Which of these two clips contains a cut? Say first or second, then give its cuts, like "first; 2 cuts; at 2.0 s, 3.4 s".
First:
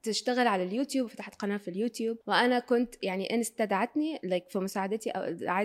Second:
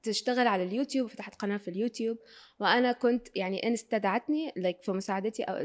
first; 1 cut; at 2.2 s